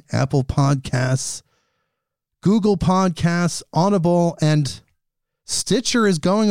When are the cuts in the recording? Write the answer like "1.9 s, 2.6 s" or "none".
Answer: none